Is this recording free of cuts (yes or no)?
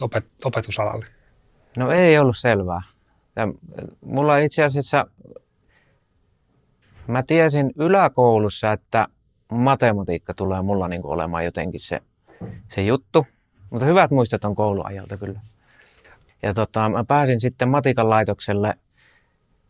no